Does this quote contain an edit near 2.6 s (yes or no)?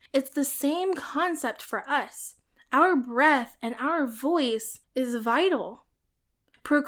no